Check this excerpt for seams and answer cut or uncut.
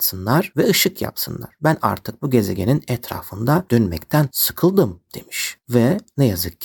uncut